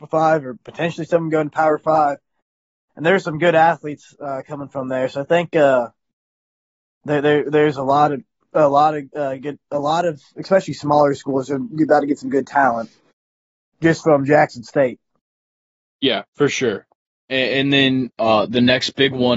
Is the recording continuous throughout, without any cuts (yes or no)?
yes